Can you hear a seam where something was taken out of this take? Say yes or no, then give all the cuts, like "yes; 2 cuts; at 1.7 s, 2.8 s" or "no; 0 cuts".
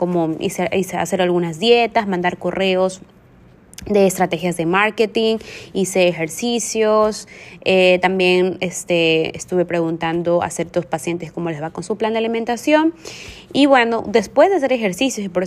no; 0 cuts